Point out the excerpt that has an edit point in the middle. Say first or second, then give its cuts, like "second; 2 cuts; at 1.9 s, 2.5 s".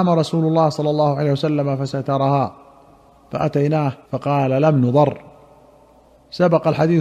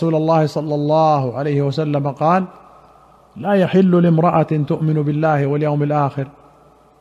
first; 1 cut; at 4.0 s